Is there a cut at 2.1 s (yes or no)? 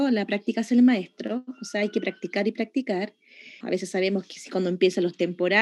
no